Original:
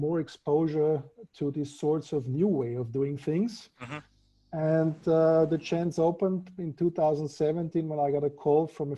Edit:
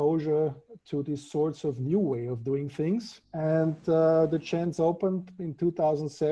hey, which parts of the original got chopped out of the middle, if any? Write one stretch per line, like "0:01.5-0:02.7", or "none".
0:03.7-0:04.4